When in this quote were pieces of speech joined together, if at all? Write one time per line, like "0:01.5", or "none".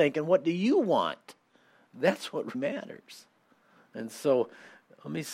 0:02.5